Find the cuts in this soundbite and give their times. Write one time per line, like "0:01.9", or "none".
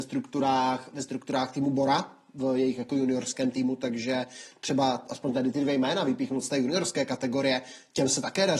none